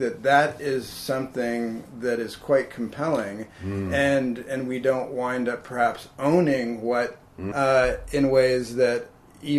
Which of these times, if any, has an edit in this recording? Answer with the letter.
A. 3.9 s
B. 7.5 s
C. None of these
B